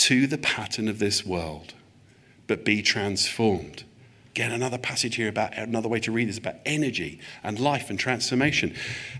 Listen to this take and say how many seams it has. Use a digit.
0